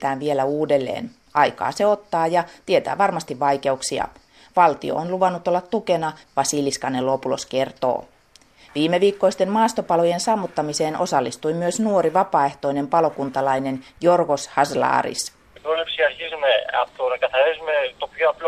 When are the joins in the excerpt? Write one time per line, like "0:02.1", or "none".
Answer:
0:06.2